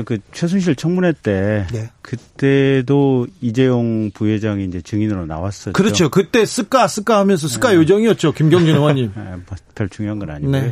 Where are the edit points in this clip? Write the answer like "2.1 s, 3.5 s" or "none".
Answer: none